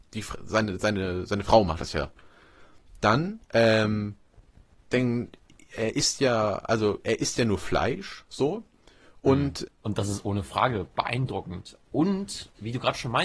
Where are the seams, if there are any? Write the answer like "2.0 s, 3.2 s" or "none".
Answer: 3.4 s, 9.7 s